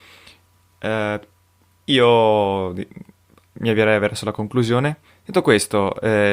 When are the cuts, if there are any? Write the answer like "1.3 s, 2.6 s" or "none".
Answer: 5.1 s

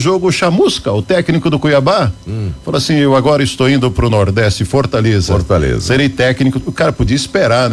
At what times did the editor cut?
none

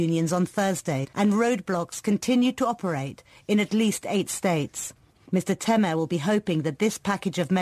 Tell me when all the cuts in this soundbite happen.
1.1 s

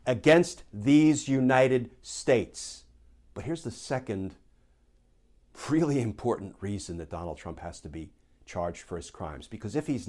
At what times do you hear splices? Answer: 3.3 s

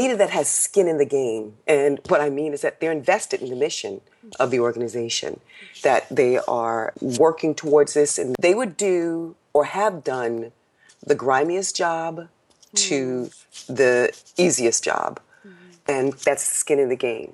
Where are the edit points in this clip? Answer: none

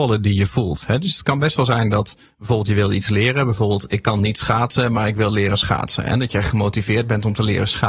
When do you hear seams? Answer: none

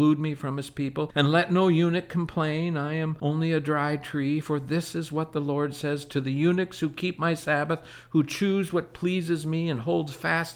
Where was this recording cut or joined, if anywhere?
none

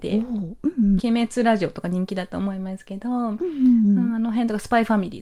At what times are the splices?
1.0 s

